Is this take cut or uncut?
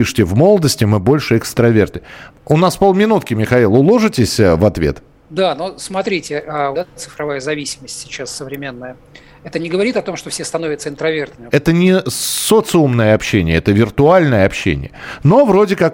cut